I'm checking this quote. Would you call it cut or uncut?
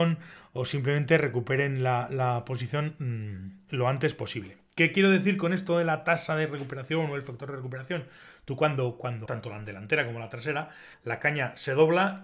cut